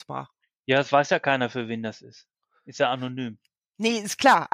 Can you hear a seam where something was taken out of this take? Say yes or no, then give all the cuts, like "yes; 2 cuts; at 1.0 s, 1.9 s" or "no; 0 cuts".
no; 0 cuts